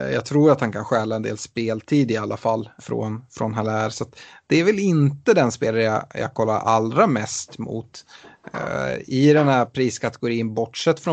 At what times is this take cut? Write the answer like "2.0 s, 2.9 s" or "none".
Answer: 2.8 s